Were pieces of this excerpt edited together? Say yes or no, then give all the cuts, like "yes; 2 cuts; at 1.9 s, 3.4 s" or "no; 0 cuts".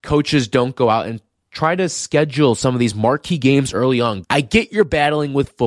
yes; 1 cut; at 4.2 s